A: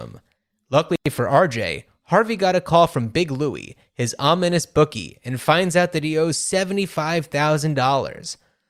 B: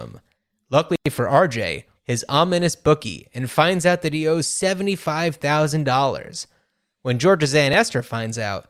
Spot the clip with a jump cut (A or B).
B